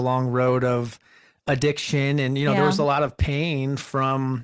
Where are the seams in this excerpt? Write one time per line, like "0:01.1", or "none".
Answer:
none